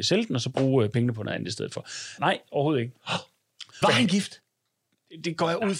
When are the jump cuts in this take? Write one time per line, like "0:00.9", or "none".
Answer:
0:02.2
0:03.8